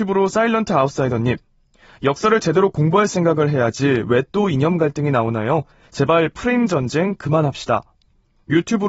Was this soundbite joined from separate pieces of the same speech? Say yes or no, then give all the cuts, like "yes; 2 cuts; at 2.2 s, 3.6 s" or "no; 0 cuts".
no; 0 cuts